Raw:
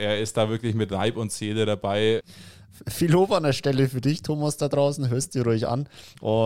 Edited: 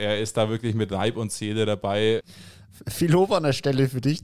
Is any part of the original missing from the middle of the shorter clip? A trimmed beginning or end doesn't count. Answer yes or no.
no